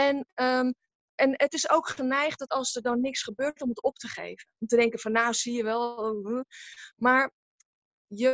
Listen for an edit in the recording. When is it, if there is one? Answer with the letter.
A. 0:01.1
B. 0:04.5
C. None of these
A